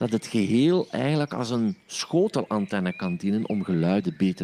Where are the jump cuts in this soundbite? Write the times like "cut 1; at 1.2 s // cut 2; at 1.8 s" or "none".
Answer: none